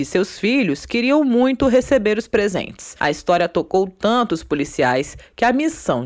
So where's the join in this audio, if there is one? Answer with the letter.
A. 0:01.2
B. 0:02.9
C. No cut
C